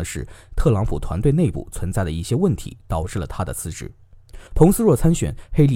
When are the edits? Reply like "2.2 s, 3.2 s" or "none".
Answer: 4.5 s

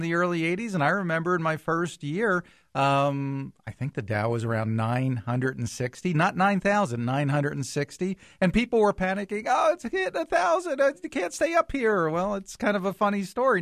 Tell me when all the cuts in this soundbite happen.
none

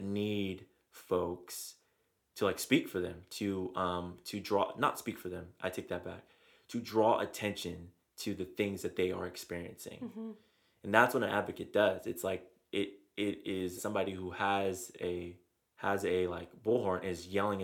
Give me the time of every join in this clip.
13.8 s

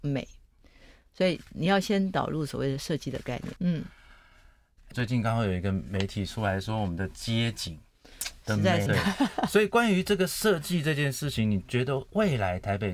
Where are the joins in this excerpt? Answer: 3.6 s, 4.9 s, 8.9 s

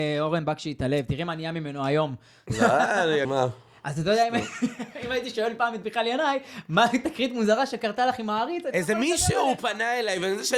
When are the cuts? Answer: 3.2 s

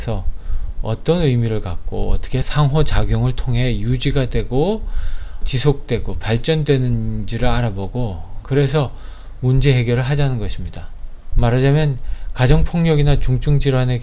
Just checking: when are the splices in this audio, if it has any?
11.3 s

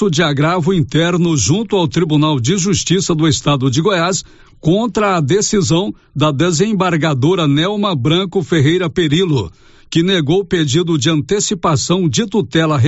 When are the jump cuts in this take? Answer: none

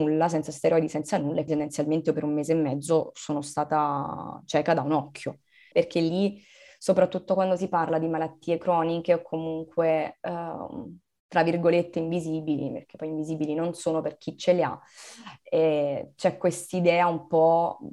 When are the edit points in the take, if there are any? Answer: 1.5 s, 5.7 s

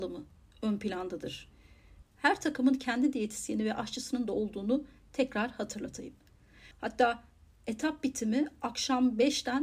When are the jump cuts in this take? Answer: 2.0 s, 6.7 s

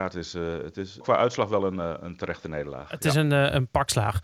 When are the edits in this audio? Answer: 1.0 s

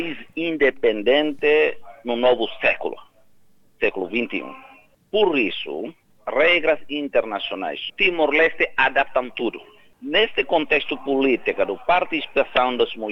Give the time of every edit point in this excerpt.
6.1 s, 7.9 s

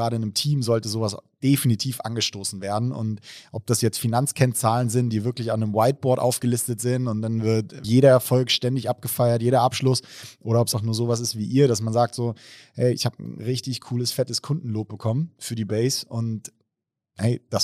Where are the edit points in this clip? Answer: 7.8 s, 10.7 s

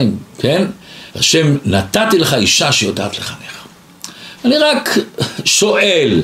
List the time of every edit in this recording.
1.1 s, 4.4 s

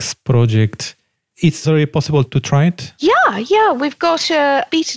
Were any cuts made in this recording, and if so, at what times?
1.6 s

